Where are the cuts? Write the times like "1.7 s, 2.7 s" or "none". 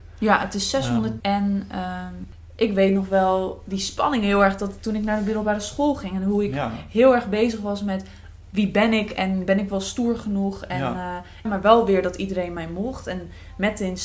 1.2 s, 11.5 s